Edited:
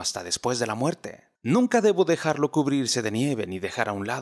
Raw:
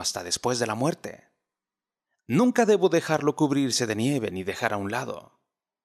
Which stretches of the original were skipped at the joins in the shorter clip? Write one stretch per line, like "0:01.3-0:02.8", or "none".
0:01.4-0:02.2